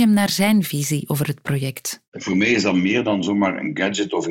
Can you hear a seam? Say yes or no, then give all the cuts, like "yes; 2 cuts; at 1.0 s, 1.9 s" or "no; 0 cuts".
no; 0 cuts